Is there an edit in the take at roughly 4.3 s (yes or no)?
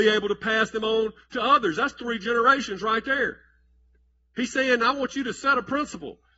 no